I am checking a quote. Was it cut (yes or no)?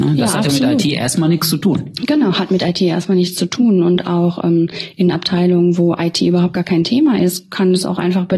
no